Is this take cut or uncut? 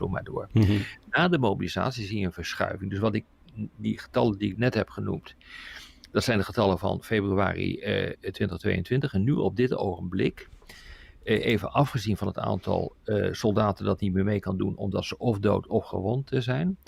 uncut